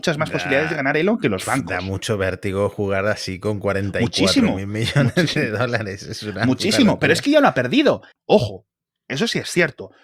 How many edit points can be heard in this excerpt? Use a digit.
1